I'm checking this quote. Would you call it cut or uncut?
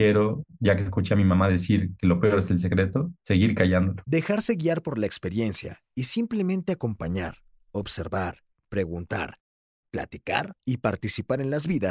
cut